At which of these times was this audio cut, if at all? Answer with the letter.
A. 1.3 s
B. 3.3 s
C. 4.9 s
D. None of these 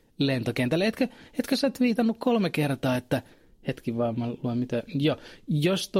D